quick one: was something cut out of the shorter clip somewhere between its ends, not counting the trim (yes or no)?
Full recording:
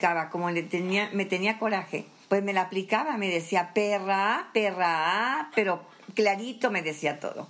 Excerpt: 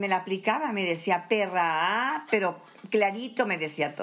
yes